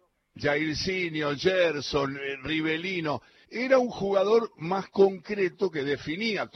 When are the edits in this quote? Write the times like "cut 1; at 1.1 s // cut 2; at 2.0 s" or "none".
none